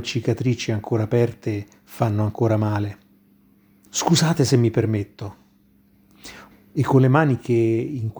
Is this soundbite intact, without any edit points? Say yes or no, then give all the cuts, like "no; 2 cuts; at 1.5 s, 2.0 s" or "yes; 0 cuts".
no; 2 cuts; at 3.9 s, 6.5 s